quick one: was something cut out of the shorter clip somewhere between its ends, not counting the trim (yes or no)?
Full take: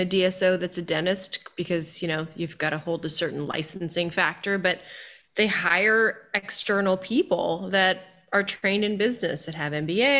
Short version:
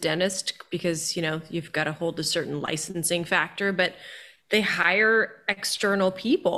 no